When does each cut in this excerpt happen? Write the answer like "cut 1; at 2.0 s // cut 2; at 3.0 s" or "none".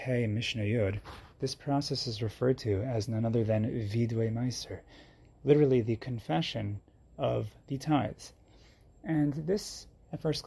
none

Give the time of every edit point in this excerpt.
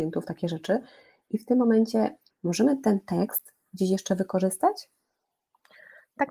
cut 1; at 2.3 s

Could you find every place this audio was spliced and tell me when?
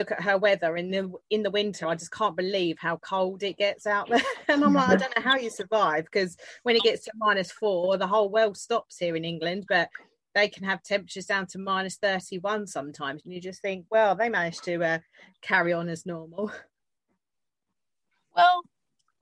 none

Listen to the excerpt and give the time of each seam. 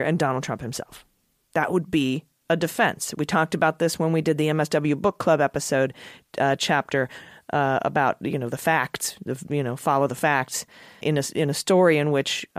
cut 1; at 11.0 s

